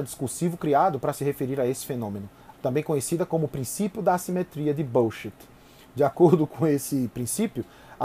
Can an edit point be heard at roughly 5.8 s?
no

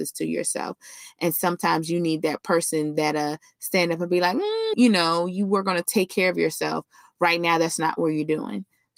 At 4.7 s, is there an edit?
yes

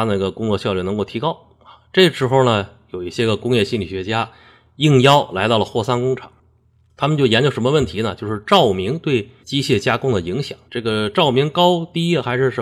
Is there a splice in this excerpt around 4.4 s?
no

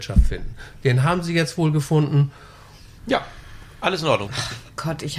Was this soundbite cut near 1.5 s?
no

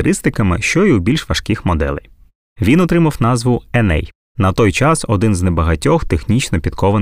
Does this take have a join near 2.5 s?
yes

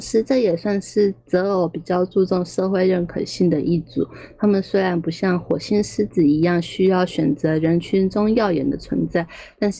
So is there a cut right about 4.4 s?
no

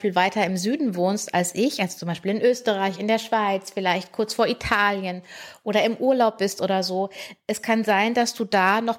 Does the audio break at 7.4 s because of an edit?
no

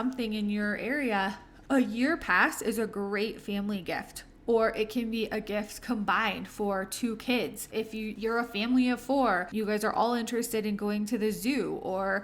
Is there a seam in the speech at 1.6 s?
yes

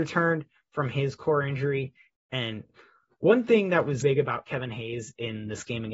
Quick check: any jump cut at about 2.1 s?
yes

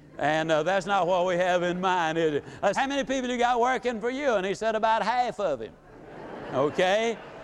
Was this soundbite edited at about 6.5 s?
no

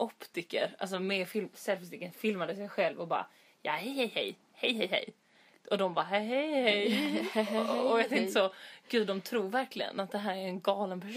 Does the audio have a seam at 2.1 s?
no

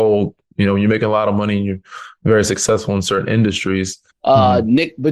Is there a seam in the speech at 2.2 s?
no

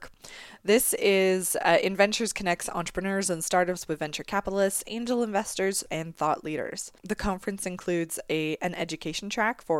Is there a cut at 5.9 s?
yes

